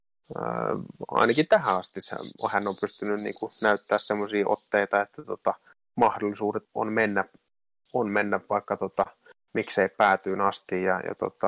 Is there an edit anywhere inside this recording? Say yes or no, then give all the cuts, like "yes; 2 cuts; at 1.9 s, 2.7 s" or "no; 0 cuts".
yes; 1 cut; at 6.7 s